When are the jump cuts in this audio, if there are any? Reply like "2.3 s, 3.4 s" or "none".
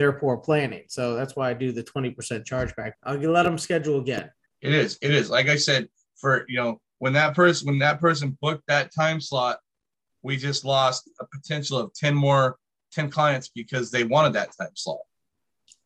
2.9 s, 4.5 s